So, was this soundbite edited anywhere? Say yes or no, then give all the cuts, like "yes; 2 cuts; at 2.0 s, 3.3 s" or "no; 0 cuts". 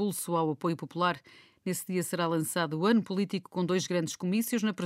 no; 0 cuts